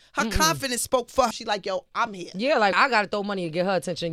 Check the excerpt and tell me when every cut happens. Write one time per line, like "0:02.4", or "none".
0:01.3
0:02.7